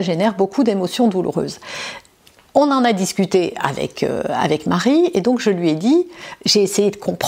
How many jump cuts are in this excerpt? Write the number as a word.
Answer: zero